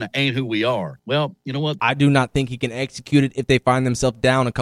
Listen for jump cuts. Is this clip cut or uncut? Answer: cut